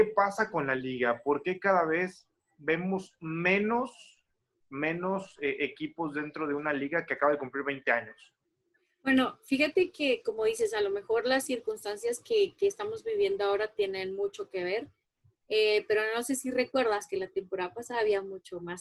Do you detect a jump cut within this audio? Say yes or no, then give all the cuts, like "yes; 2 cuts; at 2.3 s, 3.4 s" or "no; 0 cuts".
no; 0 cuts